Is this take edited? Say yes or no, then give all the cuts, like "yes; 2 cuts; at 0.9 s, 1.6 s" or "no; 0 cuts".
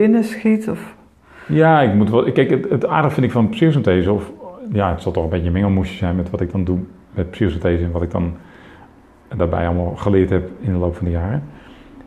no; 0 cuts